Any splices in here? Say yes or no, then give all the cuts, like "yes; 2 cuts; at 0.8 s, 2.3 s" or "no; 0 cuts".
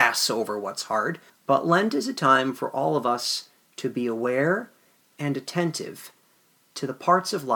yes; 1 cut; at 1.3 s